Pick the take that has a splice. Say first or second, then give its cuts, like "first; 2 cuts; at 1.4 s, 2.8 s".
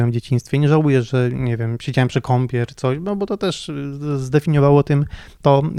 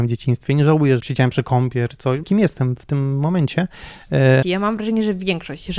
second; 3 cuts; at 1.0 s, 2.2 s, 4.4 s